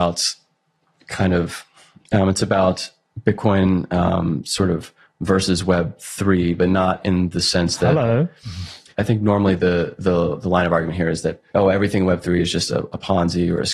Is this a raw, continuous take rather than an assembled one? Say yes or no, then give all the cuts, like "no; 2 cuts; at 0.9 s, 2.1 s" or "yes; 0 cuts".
no; 2 cuts; at 8.9 s, 11.5 s